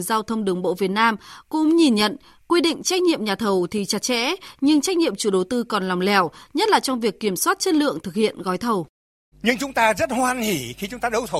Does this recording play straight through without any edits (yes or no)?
no